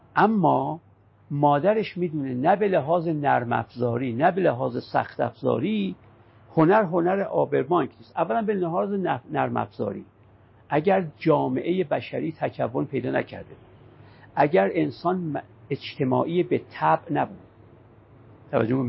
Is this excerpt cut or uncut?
uncut